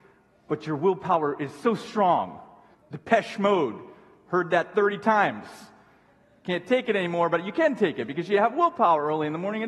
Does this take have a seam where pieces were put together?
yes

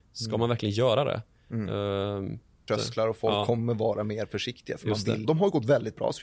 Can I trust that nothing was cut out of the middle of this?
no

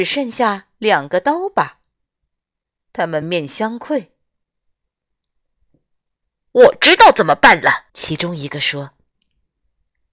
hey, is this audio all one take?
no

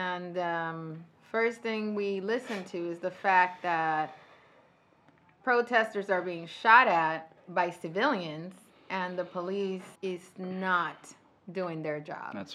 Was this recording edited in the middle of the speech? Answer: yes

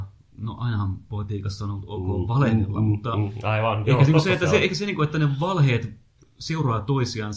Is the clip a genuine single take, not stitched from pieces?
yes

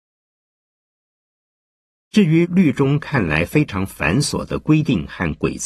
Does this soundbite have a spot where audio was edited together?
no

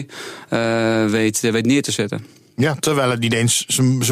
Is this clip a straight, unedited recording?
yes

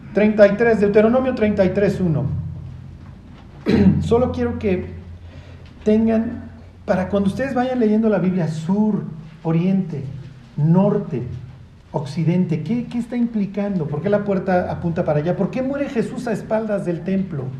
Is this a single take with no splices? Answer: no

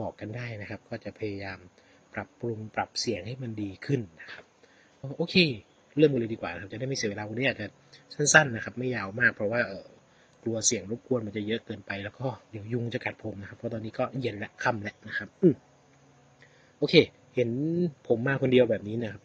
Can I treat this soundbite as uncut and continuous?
no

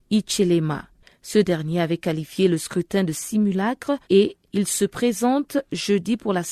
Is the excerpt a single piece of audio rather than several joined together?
no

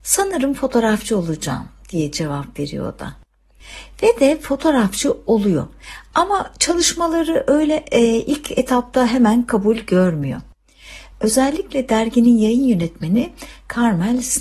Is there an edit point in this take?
no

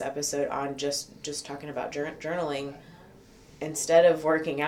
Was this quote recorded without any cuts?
yes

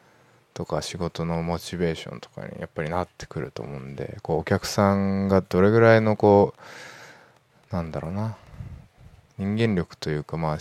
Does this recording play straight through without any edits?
yes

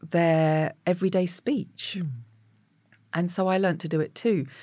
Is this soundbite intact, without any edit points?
yes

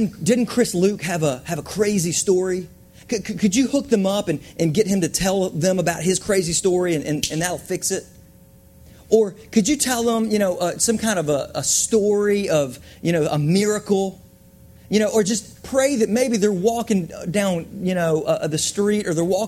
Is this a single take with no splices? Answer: yes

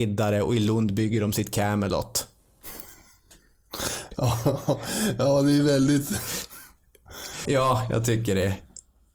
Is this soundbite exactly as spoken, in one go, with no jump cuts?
no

